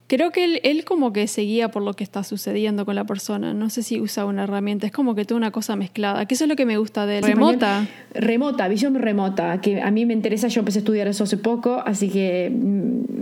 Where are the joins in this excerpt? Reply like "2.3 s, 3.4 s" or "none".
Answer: 7.2 s